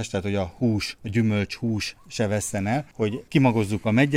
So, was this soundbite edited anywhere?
no; 0 cuts

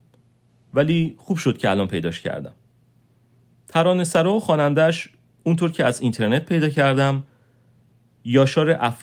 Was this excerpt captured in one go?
yes; 0 cuts

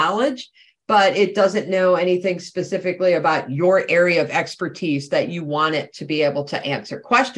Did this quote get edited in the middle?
no; 0 cuts

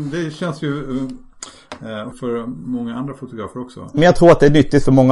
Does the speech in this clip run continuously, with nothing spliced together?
no; 1 cut; at 2.1 s

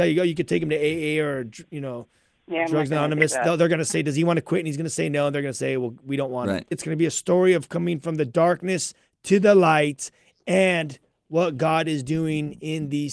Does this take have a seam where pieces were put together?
yes; 1 cut; at 6.7 s

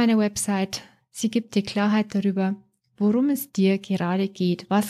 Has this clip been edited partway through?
no; 0 cuts

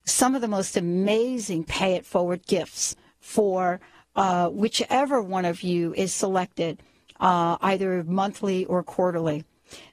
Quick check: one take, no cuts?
yes; 0 cuts

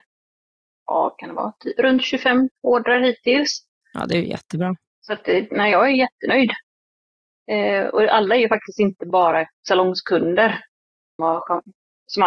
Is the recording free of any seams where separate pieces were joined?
no; 1 cut; at 11.2 s

